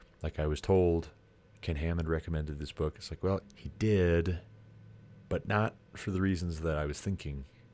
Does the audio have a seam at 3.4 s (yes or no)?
yes